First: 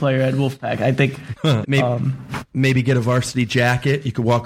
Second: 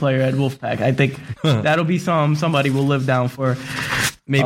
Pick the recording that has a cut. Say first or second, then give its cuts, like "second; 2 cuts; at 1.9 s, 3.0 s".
first; 1 cut; at 1.6 s